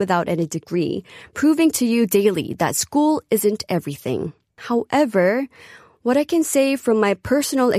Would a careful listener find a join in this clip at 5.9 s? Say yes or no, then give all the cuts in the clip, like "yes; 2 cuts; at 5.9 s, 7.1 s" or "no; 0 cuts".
no; 1 cut; at 4.6 s